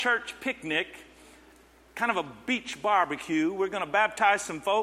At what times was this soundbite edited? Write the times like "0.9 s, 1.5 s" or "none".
none